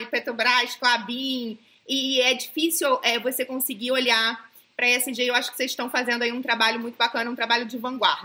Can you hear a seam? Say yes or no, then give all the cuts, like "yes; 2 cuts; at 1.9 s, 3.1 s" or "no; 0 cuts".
no; 0 cuts